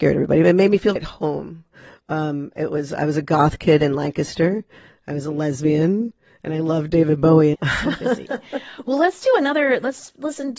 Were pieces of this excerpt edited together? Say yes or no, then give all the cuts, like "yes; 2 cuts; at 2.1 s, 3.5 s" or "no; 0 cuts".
yes; 2 cuts; at 1.0 s, 7.5 s